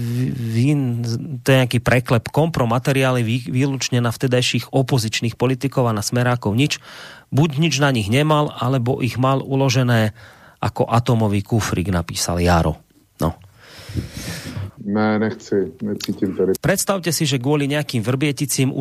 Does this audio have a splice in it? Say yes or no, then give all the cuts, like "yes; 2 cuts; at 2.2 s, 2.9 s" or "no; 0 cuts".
yes; 2 cuts; at 14.7 s, 16.6 s